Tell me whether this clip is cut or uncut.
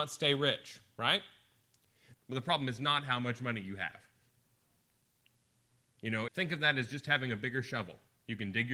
cut